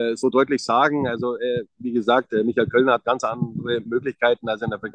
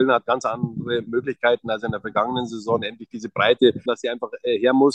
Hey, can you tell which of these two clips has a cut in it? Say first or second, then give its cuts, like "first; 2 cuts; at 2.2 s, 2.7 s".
second; 1 cut; at 3.9 s